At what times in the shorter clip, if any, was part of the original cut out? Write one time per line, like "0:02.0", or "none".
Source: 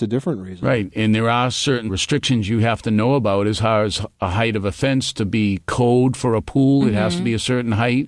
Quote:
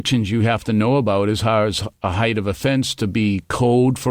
none